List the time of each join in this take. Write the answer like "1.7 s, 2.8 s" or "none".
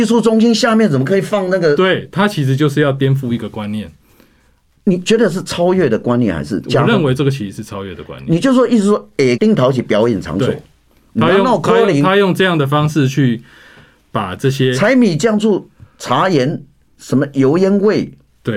9.4 s